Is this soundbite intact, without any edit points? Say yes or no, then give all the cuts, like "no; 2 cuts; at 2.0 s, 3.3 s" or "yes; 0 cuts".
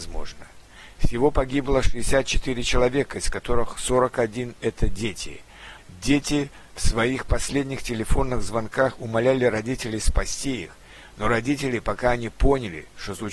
no; 1 cut; at 5.8 s